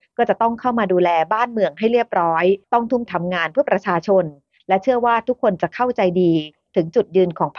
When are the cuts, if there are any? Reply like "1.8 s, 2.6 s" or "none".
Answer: 3.1 s